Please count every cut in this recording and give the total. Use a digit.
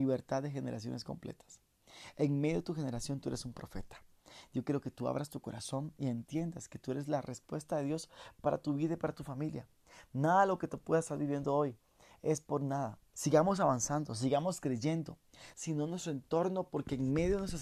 2